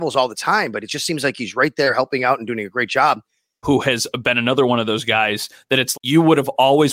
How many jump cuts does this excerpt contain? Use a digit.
2